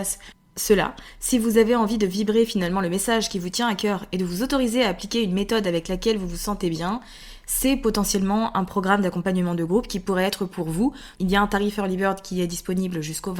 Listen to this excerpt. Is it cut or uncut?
cut